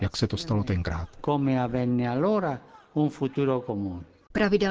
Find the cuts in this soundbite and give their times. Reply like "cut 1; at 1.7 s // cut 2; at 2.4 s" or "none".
none